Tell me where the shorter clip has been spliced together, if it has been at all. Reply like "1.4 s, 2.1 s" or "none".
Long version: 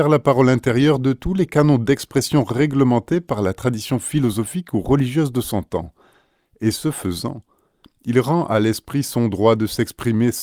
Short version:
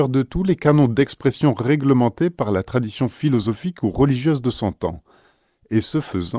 none